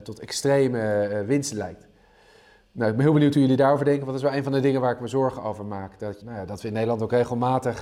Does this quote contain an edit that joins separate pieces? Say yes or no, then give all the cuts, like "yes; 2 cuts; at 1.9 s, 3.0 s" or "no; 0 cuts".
yes; 1 cut; at 6.2 s